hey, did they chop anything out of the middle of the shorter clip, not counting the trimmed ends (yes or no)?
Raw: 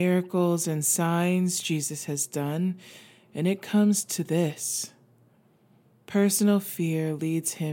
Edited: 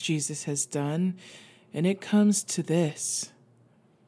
no